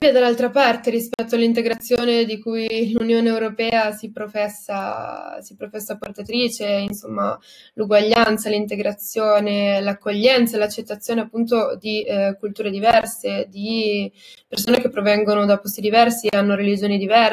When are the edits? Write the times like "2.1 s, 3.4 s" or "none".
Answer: none